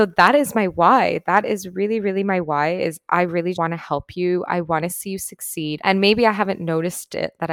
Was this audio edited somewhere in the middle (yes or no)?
yes